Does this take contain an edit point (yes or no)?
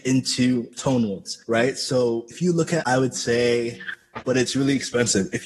yes